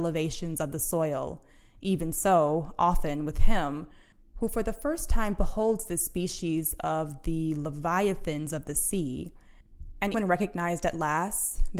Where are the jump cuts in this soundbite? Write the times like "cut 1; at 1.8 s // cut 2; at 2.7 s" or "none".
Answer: cut 1; at 10.1 s

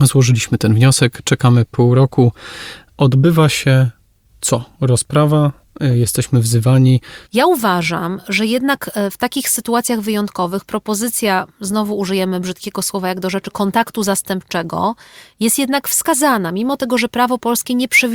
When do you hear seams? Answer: cut 1; at 7.3 s

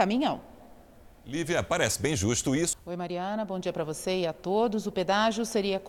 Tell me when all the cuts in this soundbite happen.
cut 1; at 2.7 s

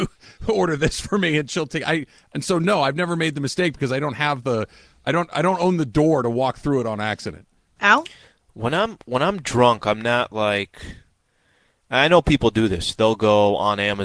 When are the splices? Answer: none

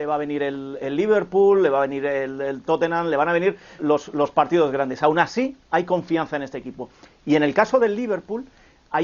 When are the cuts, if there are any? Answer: cut 1; at 3.8 s

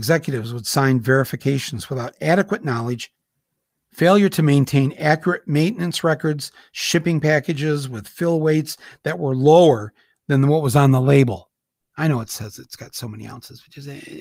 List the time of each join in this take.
cut 1; at 11.8 s

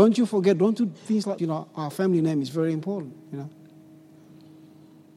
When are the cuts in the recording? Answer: cut 1; at 1.4 s

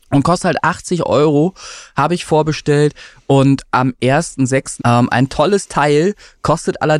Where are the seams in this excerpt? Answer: cut 1; at 4.8 s

